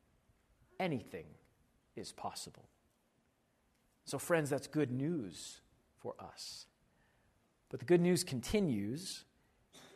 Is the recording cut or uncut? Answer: uncut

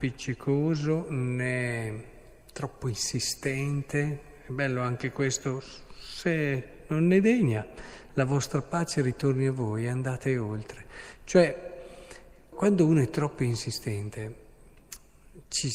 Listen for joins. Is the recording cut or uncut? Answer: cut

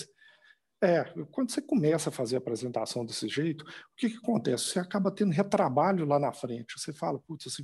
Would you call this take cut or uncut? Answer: uncut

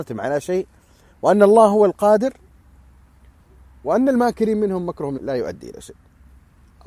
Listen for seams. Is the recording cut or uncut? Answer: cut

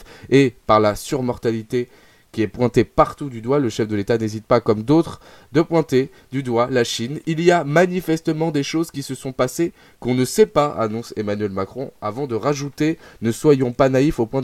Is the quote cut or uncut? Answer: uncut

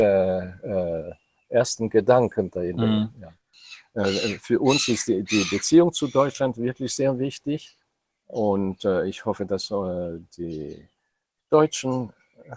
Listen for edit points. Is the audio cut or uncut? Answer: uncut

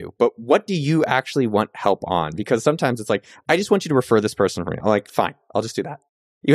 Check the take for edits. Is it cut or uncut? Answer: uncut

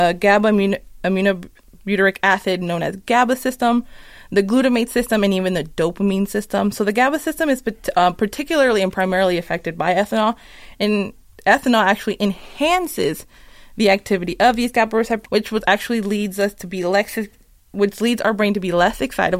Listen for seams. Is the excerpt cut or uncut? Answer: cut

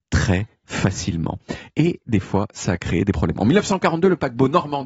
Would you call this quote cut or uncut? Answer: uncut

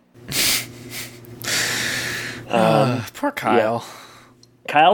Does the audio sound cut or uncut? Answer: uncut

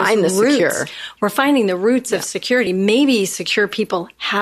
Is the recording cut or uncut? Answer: uncut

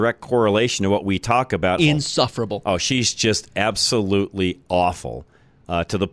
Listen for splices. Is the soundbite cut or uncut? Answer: cut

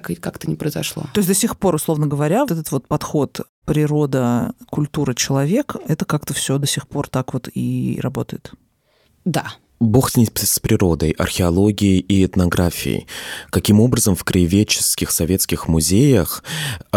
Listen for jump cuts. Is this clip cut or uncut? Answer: cut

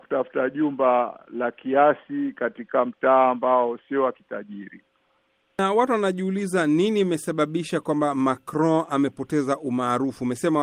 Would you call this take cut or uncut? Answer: uncut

